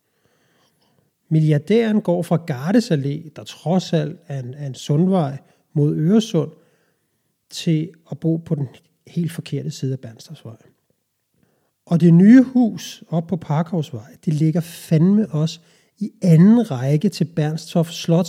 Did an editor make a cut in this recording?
yes; 1 cut; at 1.1 s

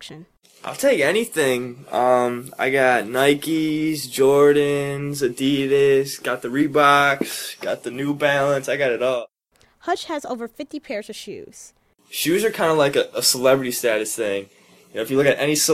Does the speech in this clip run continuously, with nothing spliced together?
yes; 0 cuts

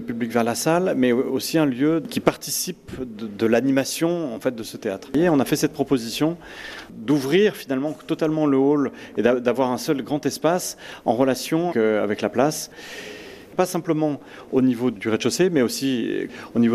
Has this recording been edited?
yes; 1 cut; at 11.7 s

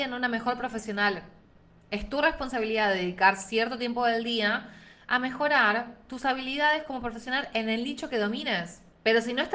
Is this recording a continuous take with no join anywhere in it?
yes; 0 cuts

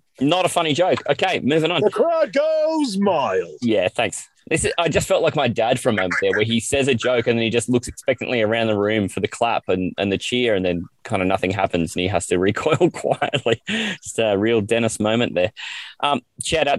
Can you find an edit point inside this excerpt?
no; 0 cuts

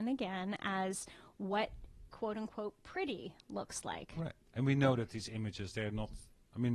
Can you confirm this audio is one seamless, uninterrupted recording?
yes; 0 cuts

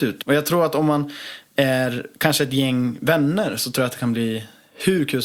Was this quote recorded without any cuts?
yes; 0 cuts

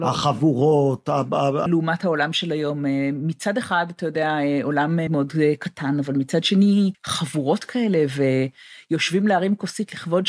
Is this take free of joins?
no; 3 cuts; at 1.7 s, 5.1 s, 6.9 s

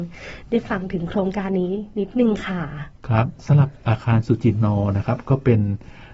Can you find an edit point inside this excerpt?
no; 0 cuts

